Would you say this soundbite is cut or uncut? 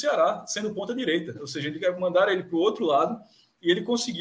uncut